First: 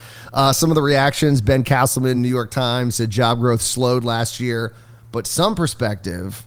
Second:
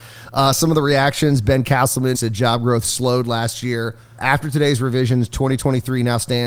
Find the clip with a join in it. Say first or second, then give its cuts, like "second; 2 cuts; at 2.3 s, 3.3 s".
second; 2 cuts; at 2.1 s, 4.2 s